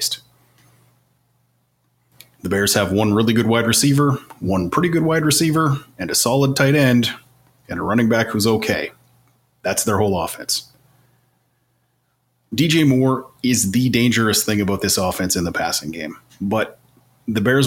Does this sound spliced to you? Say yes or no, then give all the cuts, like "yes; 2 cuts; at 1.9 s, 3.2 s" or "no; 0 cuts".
no; 0 cuts